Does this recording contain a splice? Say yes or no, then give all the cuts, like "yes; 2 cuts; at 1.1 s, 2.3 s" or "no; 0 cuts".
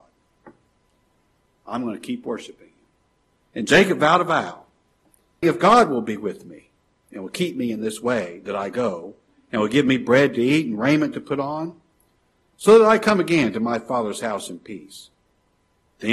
yes; 2 cuts; at 3.4 s, 5.4 s